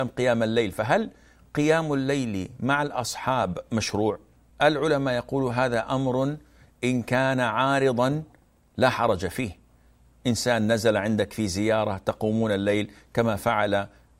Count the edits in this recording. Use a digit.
1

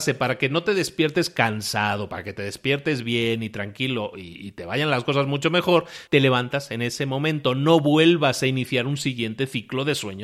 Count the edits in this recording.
1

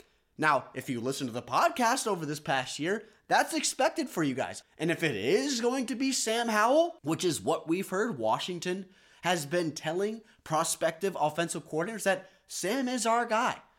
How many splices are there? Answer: 2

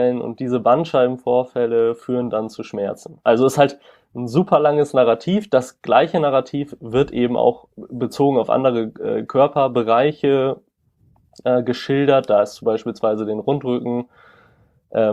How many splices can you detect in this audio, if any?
0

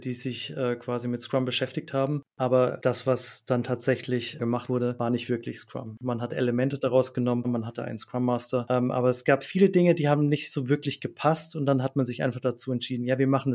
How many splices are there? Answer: 1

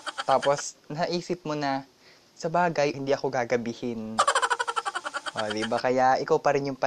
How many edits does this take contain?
1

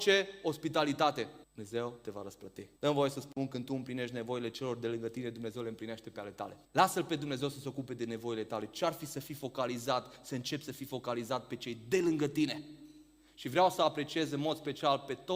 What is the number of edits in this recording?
3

